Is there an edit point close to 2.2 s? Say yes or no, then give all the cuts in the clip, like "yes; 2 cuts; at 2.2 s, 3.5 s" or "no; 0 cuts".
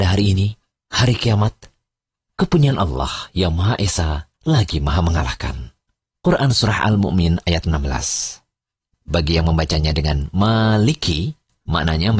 no; 0 cuts